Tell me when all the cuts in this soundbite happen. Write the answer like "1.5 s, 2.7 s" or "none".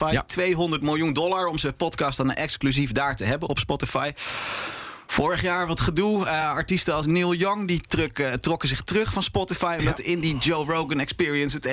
none